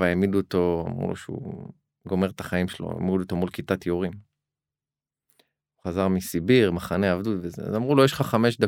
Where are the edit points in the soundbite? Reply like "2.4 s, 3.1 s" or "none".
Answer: none